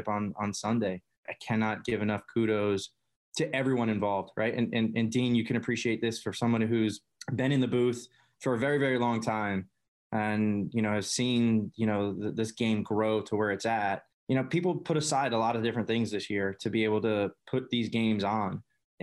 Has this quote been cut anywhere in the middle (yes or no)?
no